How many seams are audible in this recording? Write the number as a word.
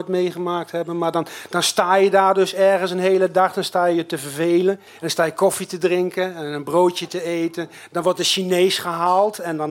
one